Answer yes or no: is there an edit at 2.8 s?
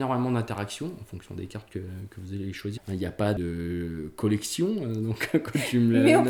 yes